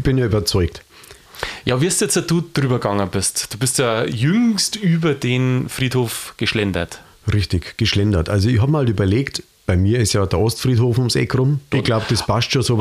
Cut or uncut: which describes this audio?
cut